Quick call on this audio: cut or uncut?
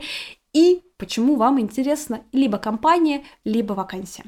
uncut